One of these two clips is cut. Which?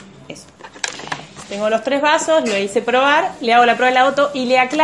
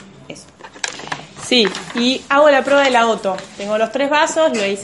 first; 1 cut; at 1.4 s

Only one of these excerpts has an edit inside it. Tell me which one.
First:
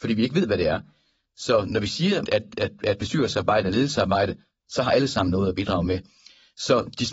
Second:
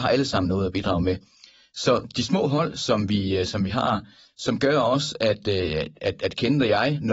first; 1 cut; at 2.3 s

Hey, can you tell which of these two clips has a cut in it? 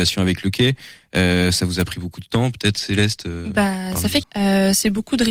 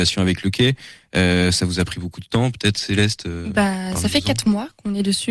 first; 1 cut; at 4.2 s

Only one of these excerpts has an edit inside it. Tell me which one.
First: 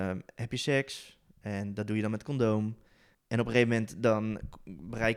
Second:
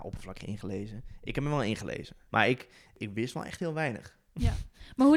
second; 1 cut; at 2.3 s

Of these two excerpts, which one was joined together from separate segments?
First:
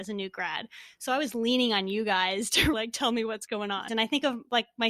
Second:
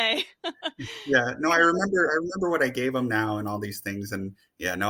first; 2 cuts; at 2.7 s, 3.9 s

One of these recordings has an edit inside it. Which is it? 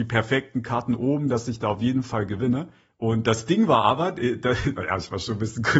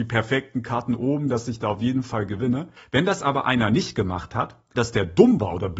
second; 2 cuts; at 2.8 s, 4.7 s

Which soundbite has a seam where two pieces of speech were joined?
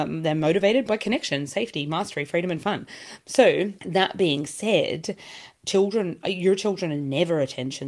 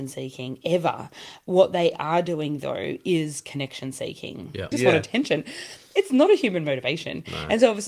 second; 1 cut; at 4.7 s

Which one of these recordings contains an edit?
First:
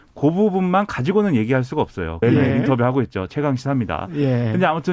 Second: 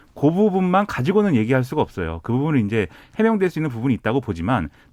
first; 2 cuts; at 2.2 s, 3.3 s

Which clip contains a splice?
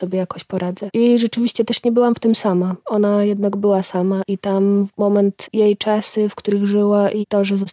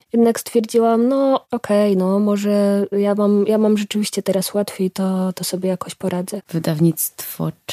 second; 1 cut; at 6.4 s

